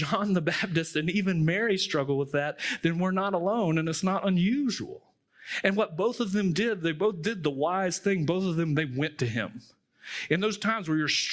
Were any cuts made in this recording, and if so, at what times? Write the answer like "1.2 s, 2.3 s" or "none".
none